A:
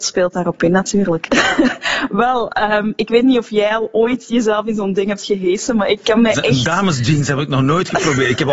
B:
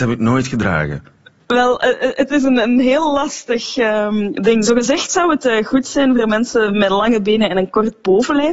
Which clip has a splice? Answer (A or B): A